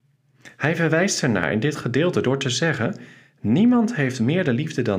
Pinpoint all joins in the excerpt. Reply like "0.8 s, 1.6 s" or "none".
none